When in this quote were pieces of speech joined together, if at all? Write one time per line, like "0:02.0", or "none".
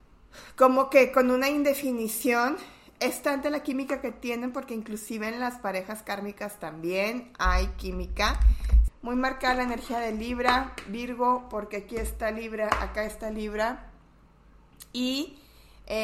0:08.9